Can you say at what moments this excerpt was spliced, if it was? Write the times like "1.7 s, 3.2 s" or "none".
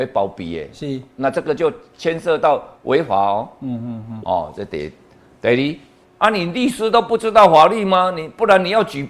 4.2 s, 6.0 s

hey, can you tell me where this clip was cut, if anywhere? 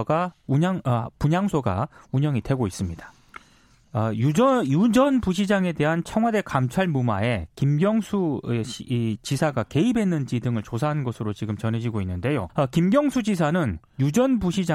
3.8 s, 12.5 s

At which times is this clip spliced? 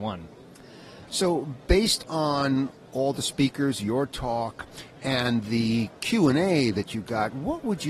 1.1 s

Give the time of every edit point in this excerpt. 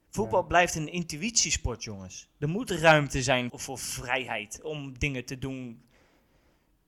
3.5 s

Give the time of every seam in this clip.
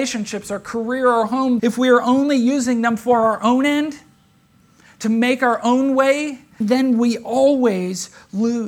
1.6 s, 6.6 s

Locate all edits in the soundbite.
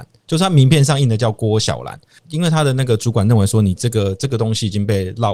2.2 s

